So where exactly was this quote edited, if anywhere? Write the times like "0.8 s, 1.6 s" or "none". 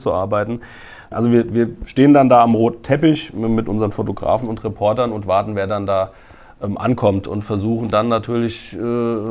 1.1 s